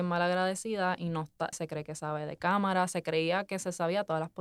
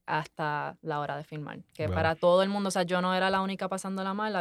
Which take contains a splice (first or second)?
first